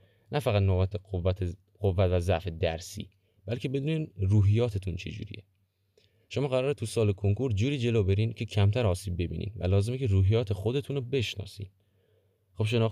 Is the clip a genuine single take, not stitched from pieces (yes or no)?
yes